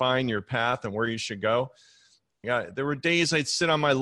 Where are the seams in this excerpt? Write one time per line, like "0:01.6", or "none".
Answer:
0:02.4